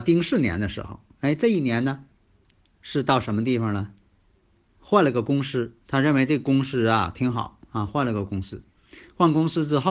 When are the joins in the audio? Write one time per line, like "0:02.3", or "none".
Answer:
0:05.8